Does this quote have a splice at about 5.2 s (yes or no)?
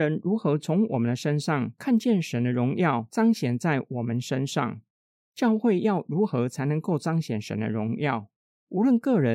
yes